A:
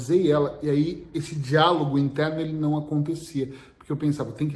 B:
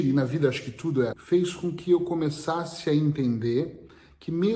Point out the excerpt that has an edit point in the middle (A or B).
B